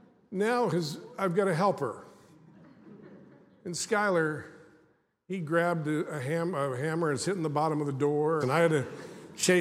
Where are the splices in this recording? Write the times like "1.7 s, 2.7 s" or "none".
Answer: 8.4 s